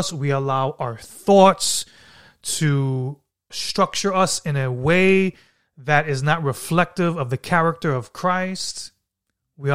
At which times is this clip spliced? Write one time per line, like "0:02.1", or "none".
0:03.5